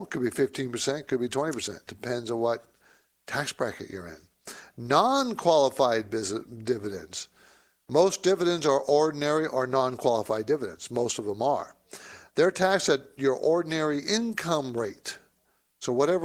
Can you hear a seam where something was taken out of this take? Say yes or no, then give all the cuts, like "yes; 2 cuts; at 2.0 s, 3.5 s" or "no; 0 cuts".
no; 0 cuts